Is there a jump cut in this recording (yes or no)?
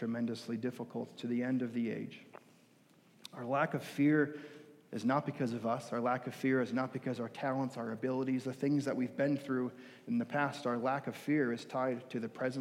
no